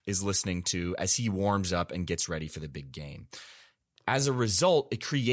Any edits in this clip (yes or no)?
no